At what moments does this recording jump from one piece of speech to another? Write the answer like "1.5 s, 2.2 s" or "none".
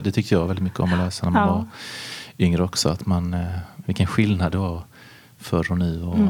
3.8 s